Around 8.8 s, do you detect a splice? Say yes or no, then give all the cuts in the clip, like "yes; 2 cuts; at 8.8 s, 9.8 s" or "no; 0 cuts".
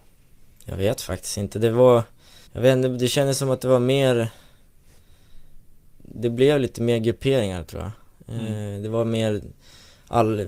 no; 2 cuts; at 2.5 s, 6.0 s